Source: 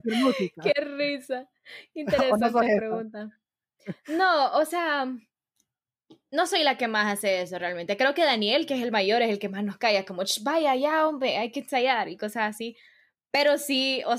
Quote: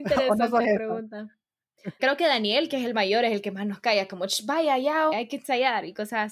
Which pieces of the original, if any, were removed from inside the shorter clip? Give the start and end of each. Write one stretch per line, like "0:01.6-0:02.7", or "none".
0:04.0-0:08.0
0:11.1-0:11.3

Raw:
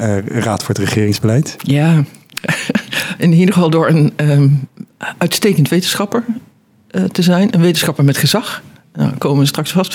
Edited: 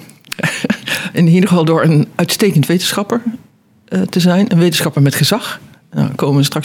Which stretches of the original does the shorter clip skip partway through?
0:04.2-0:05.1

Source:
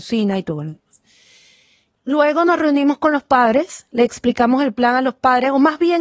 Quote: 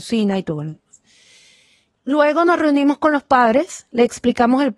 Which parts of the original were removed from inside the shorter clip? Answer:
none

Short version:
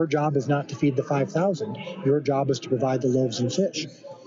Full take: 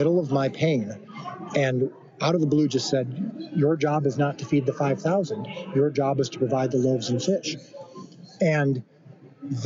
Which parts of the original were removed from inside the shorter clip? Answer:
none

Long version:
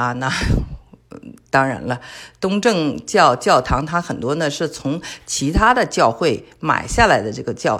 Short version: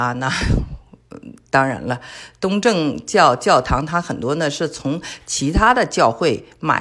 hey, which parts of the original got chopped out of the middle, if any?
none

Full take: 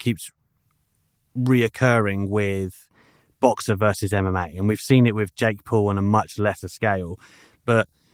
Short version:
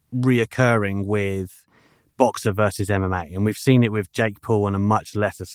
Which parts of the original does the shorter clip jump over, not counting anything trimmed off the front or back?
none

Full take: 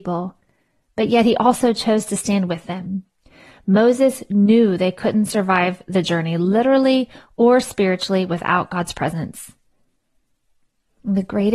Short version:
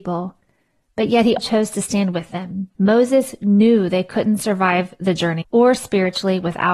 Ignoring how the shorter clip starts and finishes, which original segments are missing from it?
0:01.4-0:01.7
0:03.1-0:03.6
0:06.3-0:07.3

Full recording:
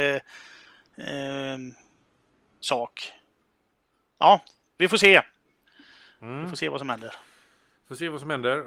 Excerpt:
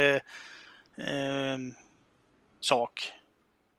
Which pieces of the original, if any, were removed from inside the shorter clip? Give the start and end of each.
none

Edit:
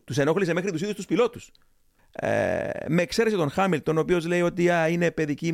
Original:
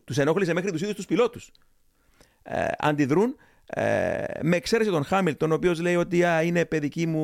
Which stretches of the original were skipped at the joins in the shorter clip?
0:02.0-0:03.5

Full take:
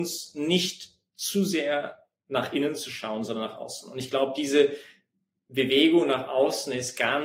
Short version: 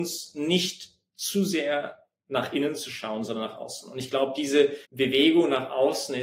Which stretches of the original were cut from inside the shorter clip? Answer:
0:04.9-0:05.4

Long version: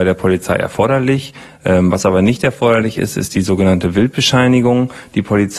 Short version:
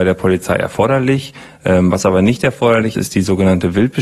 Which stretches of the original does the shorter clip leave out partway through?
0:02.9-0:03.1

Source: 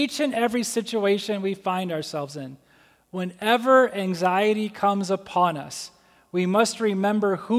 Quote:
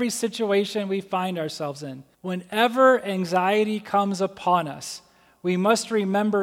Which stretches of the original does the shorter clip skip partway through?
0:02.7-0:03.0

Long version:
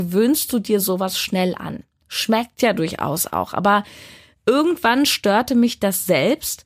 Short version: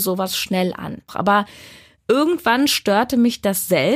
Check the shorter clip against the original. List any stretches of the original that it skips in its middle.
0:01.9-0:03.5

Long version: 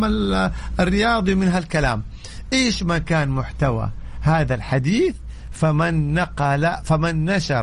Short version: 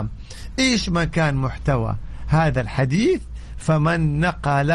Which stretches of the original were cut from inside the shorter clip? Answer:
none

